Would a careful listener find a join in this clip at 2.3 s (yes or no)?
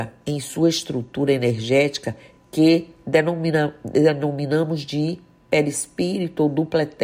no